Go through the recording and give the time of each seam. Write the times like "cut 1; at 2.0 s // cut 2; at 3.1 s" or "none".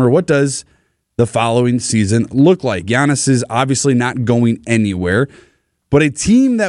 none

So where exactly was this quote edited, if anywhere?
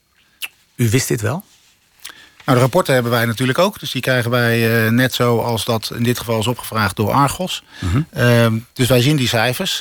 none

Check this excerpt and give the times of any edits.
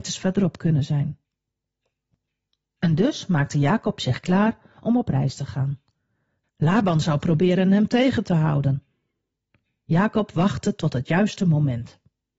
cut 1; at 6.5 s

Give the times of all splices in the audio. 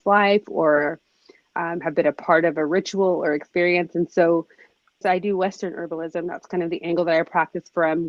cut 1; at 5.0 s

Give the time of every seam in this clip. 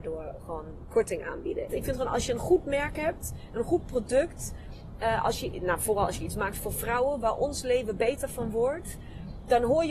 cut 1; at 1.7 s

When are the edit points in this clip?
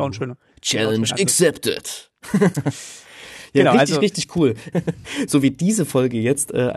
cut 1; at 4.7 s

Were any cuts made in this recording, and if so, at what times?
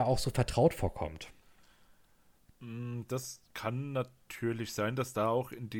cut 1; at 3.5 s

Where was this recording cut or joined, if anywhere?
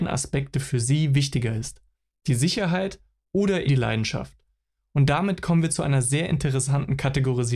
cut 1; at 3.7 s

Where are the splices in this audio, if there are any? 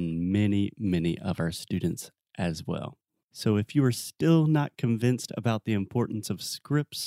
none

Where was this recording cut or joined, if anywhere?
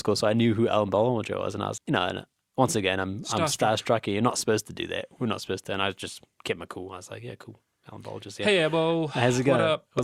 cut 1; at 1.8 s

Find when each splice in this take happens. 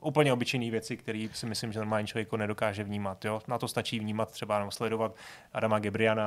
none

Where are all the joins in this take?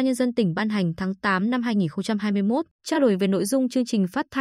cut 1; at 2.7 s

